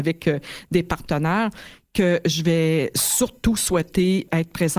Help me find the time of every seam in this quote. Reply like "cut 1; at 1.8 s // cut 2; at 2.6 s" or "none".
none